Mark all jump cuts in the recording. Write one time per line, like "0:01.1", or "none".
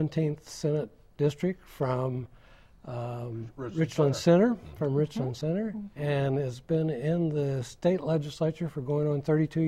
none